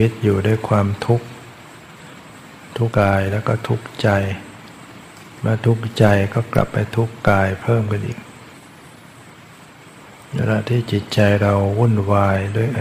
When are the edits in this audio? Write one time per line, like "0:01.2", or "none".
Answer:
0:02.9